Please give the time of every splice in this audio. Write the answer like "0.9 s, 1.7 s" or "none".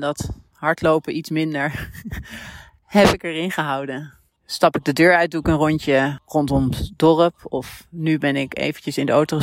4.4 s